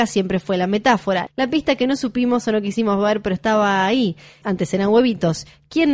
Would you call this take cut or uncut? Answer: cut